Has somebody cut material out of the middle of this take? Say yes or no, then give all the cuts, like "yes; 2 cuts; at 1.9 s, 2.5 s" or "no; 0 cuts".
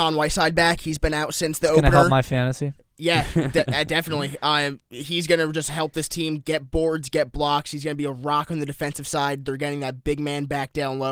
no; 0 cuts